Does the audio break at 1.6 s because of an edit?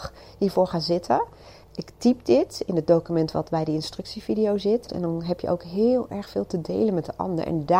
yes; 2 cuts; at 1.6 s, 4.9 s

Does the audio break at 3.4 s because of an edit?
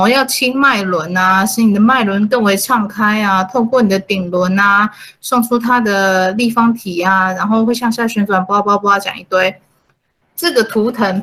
no; 1 cut; at 10.2 s

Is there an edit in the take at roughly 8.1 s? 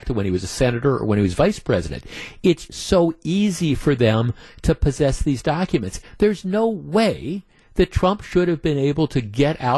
no; 2 cuts; at 2.7 s, 6.0 s

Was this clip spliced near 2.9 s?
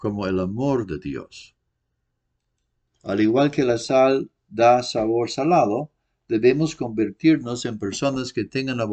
yes; 1 cut; at 2.9 s

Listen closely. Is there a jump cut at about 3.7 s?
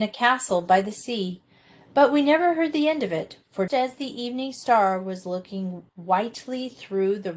yes; 2 cuts; at 3.7 s, 5.9 s

